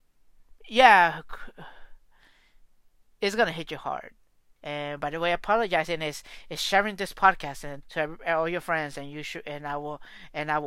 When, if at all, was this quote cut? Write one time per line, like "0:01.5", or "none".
0:04.6
0:07.8